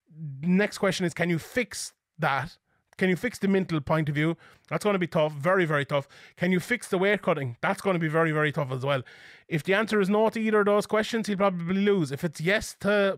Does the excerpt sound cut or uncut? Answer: uncut